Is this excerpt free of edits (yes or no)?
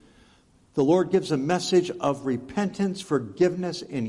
yes